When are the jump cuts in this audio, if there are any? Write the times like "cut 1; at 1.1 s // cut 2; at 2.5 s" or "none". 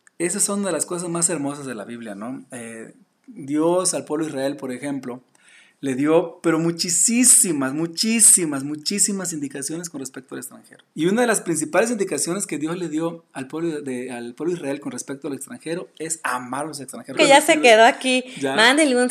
cut 1; at 10.9 s // cut 2; at 17.1 s